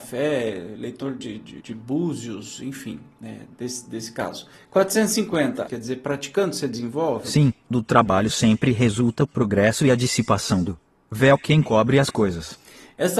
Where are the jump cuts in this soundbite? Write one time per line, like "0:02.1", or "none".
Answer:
0:01.6
0:04.6
0:05.7